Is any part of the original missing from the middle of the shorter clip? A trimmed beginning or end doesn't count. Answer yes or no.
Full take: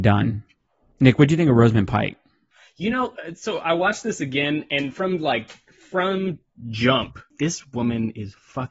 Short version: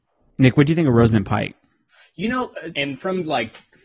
yes